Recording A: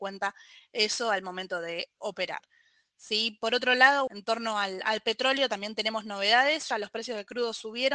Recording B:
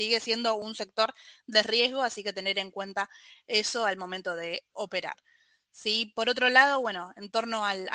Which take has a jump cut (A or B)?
A